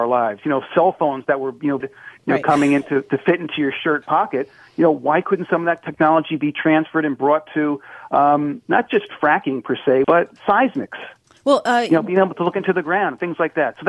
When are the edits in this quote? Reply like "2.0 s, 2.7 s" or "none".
1.8 s, 10.0 s